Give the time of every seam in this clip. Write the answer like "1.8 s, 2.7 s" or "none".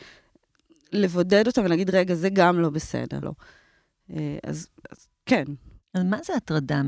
3.2 s